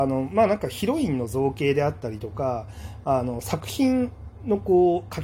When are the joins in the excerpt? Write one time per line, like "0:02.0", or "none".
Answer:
none